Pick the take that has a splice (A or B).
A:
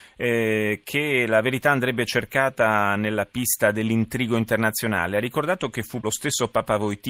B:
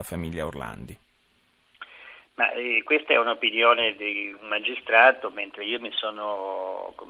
A